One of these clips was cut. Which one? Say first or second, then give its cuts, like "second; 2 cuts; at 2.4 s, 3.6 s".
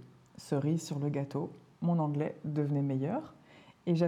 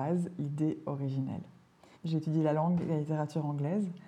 second; 1 cut; at 1.9 s